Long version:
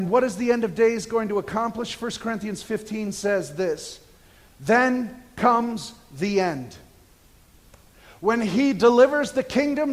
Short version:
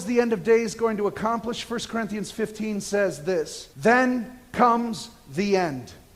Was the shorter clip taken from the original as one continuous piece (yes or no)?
no